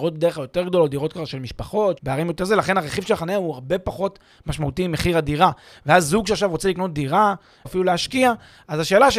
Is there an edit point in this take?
yes; 2 cuts; at 2.0 s, 7.6 s

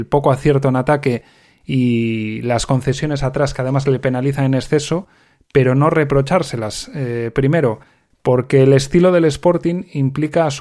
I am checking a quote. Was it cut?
no; 0 cuts

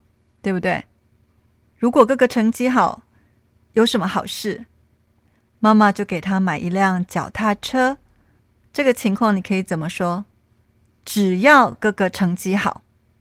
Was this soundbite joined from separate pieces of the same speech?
no; 0 cuts

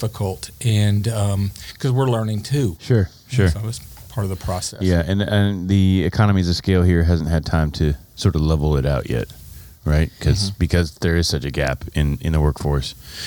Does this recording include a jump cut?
no; 0 cuts

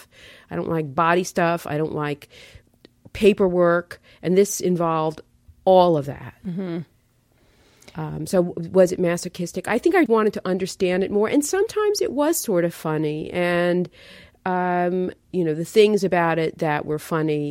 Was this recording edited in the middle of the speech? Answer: yes; 2 cuts; at 10.1 s, 15.3 s

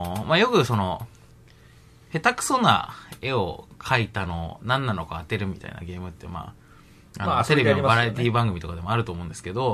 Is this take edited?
no; 0 cuts

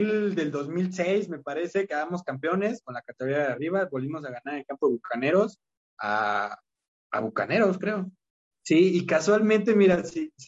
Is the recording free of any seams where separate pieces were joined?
no; 1 cut; at 8.5 s

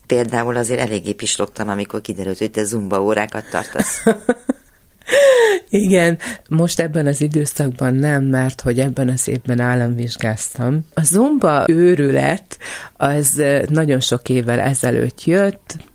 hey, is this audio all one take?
no; 1 cut; at 6.4 s

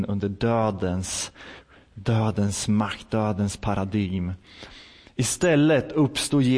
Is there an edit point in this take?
no; 0 cuts

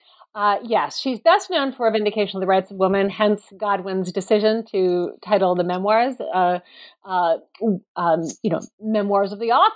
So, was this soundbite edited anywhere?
no; 0 cuts

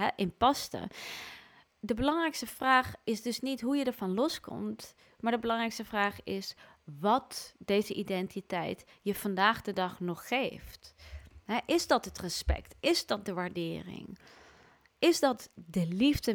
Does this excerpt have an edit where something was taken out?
no; 0 cuts

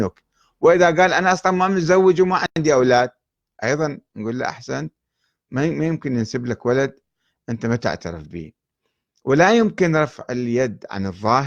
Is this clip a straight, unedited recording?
yes; 0 cuts

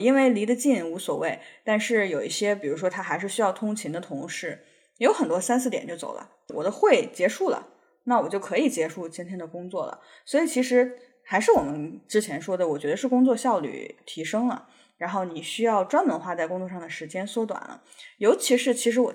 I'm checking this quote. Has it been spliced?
no; 0 cuts

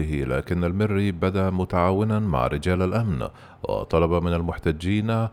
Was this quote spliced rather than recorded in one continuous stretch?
no; 0 cuts

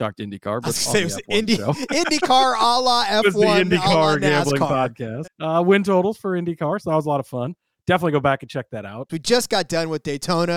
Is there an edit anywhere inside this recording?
yes; 2 cuts; at 5.2 s, 9.1 s

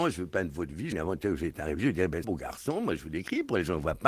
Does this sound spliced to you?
yes; 2 cuts; at 0.9 s, 2.2 s

